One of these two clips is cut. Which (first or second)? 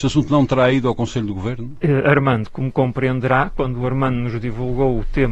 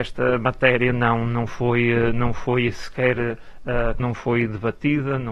second